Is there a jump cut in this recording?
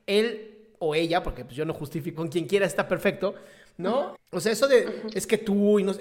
yes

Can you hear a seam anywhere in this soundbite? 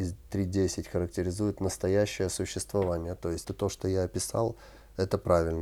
yes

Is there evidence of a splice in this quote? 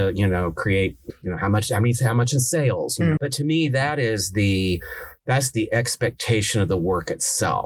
yes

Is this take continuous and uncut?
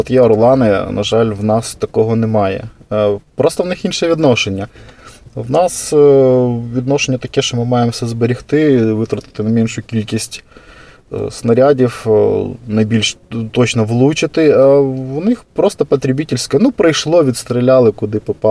yes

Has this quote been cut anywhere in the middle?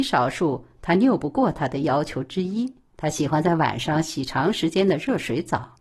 yes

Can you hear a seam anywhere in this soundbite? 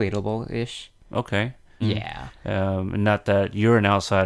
yes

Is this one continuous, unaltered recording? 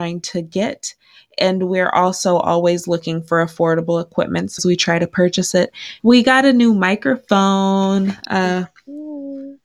no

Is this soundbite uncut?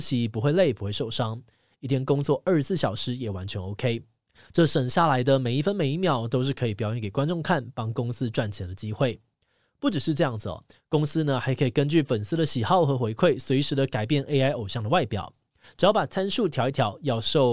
yes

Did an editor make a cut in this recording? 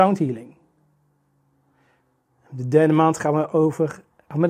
no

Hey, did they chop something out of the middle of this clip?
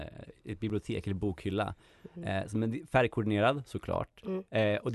no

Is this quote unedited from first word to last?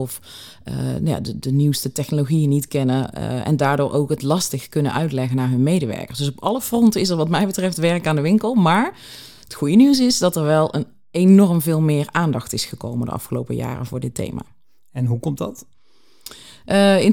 yes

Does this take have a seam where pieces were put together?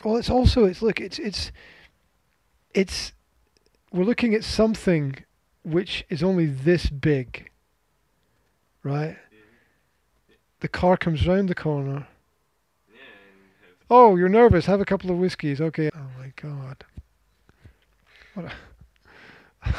yes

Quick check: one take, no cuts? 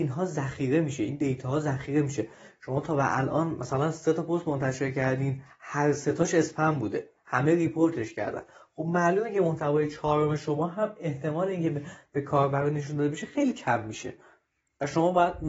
yes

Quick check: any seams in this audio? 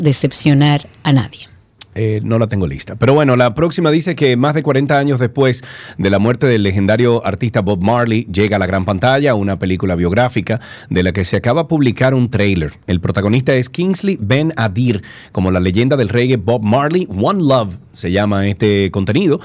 yes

